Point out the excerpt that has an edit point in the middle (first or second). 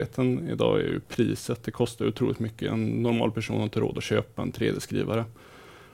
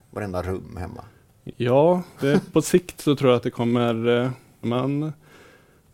second